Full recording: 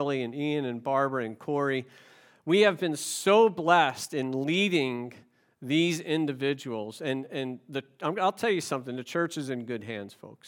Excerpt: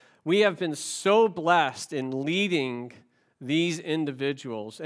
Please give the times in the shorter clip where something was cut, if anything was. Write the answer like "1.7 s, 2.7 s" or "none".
none